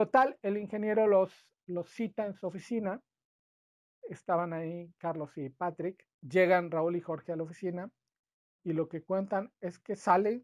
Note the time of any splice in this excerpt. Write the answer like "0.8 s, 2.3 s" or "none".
6.1 s